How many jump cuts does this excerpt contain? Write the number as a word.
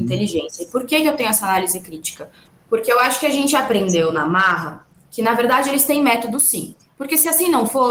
zero